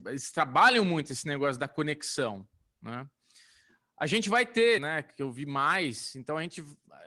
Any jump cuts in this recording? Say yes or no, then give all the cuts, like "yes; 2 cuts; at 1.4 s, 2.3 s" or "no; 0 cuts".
yes; 1 cut; at 4.8 s